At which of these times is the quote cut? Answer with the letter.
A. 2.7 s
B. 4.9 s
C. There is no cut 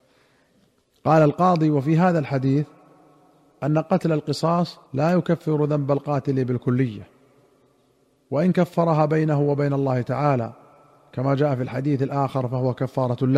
B